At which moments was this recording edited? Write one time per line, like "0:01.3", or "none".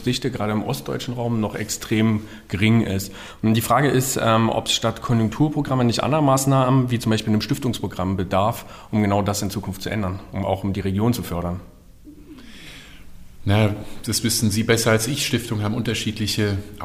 none